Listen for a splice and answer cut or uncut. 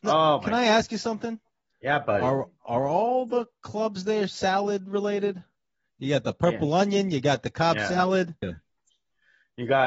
cut